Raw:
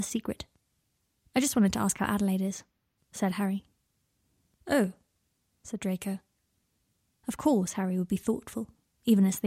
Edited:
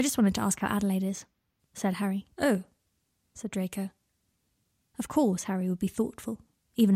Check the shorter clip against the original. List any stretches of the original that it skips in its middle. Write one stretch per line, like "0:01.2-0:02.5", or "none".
0:03.7-0:04.6